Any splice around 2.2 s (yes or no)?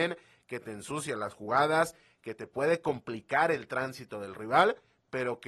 no